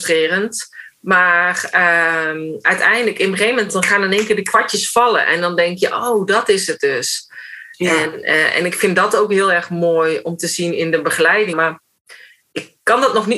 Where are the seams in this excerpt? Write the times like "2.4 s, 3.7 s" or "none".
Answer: 11.5 s